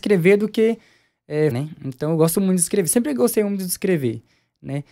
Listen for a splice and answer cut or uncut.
cut